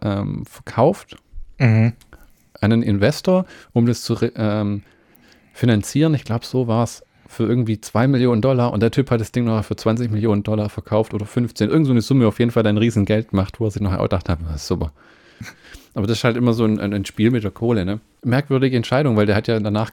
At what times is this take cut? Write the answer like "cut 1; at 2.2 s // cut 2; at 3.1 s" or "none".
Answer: cut 1; at 18.2 s